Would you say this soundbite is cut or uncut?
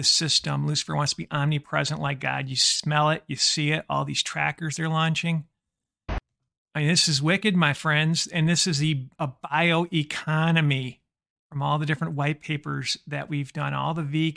uncut